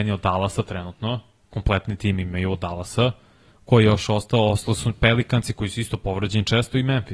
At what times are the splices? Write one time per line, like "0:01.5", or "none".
none